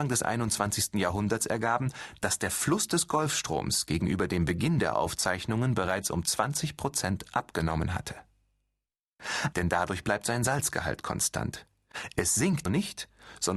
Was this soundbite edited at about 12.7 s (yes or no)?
yes